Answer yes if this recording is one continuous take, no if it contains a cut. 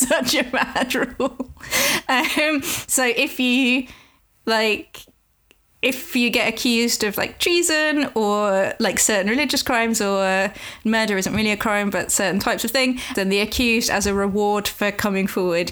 no